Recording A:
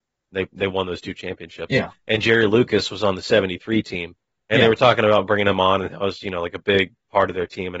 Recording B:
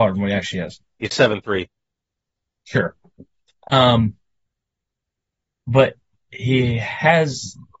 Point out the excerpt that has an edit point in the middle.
B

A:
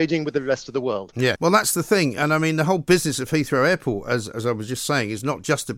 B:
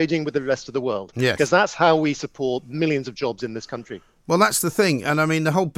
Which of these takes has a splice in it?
A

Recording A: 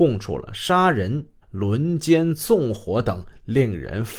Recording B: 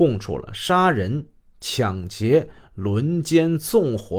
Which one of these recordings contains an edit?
A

